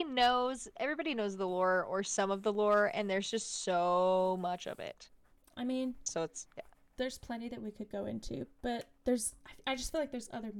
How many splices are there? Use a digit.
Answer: 0